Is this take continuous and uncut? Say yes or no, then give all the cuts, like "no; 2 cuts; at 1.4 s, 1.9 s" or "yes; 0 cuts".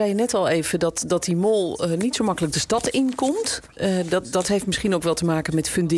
yes; 0 cuts